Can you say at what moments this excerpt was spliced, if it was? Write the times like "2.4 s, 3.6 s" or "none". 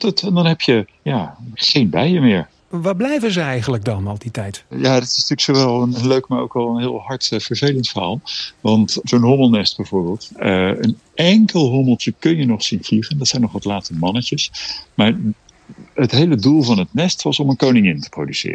1.5 s